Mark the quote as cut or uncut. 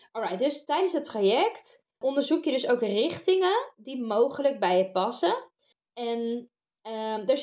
cut